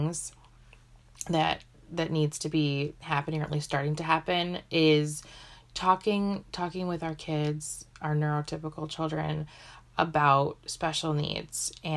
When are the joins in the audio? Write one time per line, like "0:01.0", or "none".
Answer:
none